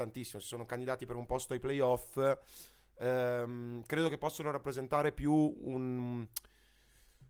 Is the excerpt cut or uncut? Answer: uncut